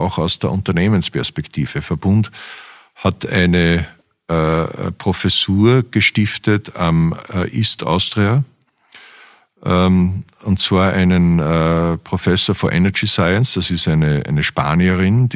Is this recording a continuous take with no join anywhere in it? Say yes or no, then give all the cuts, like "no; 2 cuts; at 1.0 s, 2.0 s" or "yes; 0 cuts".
yes; 0 cuts